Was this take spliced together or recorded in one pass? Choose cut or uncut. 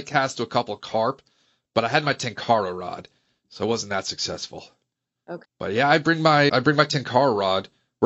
cut